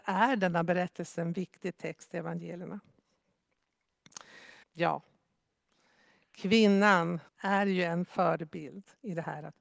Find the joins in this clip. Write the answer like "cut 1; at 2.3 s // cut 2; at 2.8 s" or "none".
cut 1; at 4.6 s // cut 2; at 7.3 s